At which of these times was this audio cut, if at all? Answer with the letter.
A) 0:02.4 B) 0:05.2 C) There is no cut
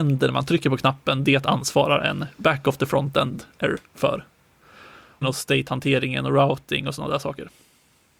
B